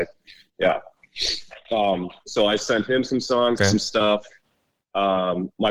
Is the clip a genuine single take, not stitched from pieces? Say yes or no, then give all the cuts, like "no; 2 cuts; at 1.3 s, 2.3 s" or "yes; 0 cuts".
no; 1 cut; at 3.6 s